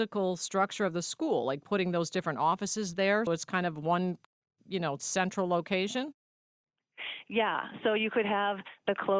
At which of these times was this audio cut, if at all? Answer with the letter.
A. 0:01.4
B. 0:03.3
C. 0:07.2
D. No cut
B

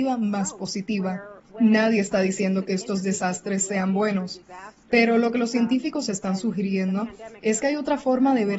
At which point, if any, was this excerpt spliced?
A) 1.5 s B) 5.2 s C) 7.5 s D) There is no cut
A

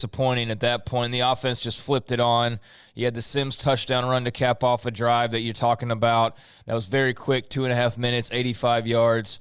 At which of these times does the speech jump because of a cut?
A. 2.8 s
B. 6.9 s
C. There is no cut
C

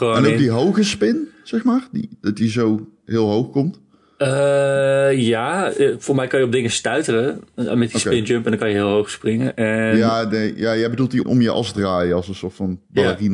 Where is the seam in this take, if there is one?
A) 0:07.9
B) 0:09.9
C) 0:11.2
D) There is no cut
C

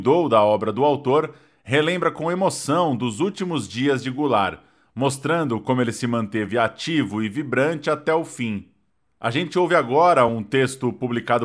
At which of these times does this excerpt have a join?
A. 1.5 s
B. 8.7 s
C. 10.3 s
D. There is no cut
D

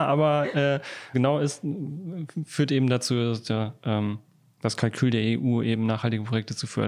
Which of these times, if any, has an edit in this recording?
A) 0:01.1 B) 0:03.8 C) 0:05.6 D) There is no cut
A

